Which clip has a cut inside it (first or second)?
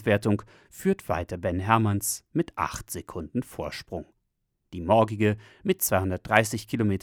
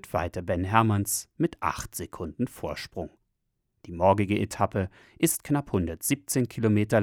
first